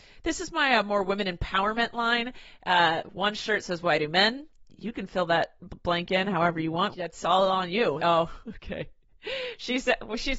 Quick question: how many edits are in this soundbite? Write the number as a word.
two